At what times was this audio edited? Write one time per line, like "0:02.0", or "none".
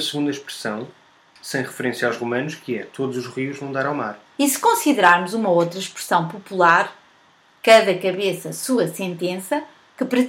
0:04.3